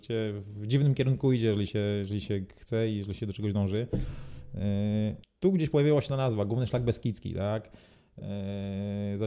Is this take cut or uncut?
cut